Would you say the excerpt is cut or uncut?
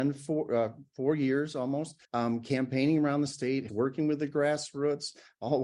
cut